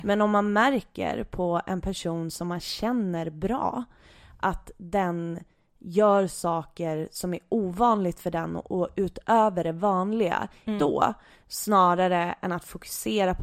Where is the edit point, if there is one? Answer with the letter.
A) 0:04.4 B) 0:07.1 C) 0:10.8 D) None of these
C